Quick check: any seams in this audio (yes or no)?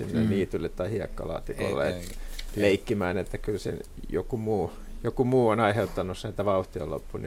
no